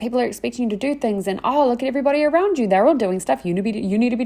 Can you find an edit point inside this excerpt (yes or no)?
no